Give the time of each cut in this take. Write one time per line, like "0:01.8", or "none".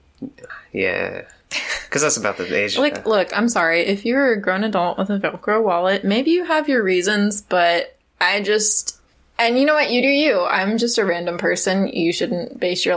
none